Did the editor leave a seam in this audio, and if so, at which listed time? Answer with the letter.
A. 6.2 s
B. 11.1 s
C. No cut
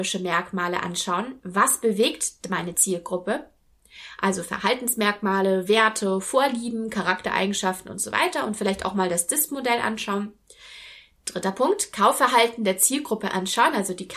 C